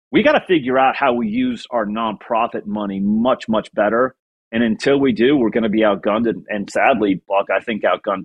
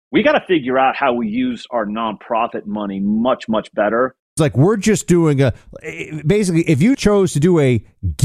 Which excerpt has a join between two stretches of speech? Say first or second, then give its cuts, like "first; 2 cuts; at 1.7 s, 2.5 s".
second; 2 cuts; at 4.4 s, 6.9 s